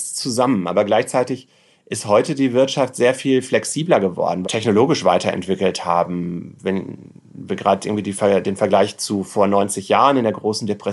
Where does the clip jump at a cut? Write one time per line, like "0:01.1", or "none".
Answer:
0:04.4